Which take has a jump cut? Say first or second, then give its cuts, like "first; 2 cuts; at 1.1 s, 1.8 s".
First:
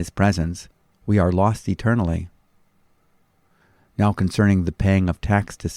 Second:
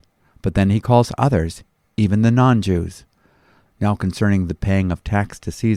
second; 1 cut; at 3.7 s